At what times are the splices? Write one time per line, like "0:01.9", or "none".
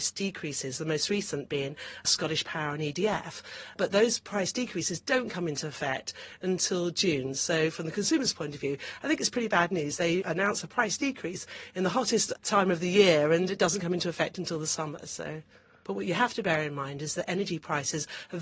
0:15.8